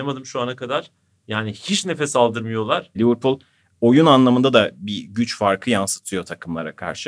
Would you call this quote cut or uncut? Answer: cut